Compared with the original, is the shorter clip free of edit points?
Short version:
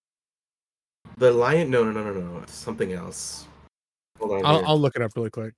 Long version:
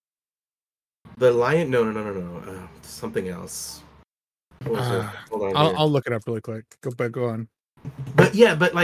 no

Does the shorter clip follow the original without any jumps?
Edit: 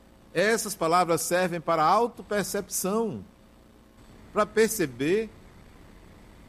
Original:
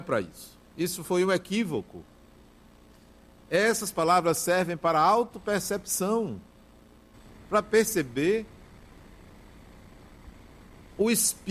yes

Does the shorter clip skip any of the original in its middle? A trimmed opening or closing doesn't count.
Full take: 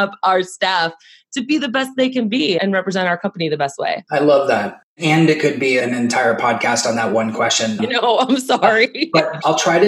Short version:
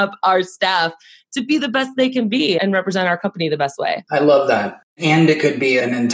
no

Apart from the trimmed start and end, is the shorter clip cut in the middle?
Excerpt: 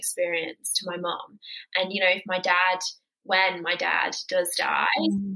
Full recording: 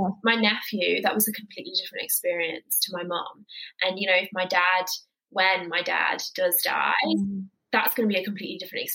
no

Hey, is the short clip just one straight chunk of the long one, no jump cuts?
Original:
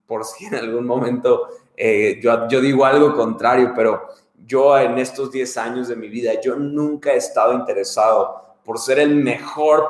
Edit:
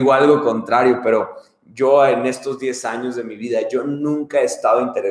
yes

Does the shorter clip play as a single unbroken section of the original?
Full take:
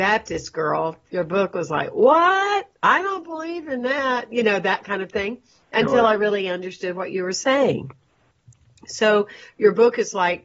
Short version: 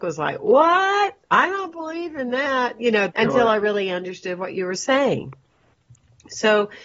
no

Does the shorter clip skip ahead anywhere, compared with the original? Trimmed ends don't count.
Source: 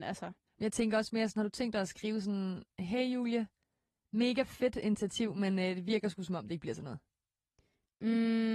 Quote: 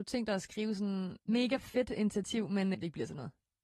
yes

